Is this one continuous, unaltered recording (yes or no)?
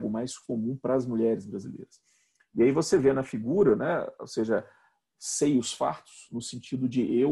yes